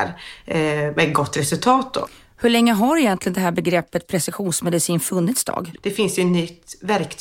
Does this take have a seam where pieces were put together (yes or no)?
yes